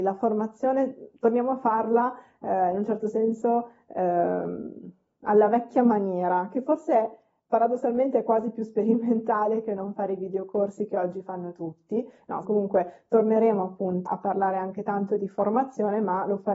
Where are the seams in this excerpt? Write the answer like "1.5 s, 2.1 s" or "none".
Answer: 12.4 s, 14.1 s